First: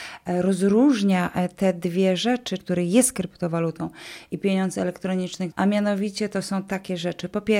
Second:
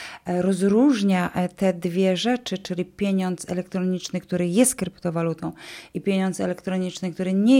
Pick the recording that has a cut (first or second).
first